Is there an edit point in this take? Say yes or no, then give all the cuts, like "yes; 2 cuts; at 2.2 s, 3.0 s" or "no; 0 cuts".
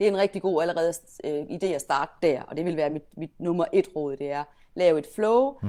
no; 0 cuts